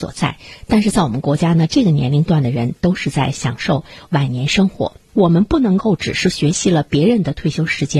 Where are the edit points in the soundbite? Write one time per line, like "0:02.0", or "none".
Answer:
0:05.1